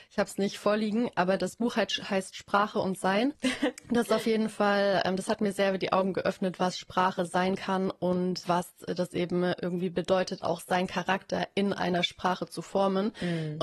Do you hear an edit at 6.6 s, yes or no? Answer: no